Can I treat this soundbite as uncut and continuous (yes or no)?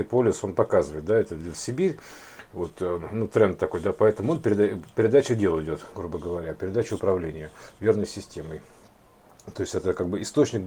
yes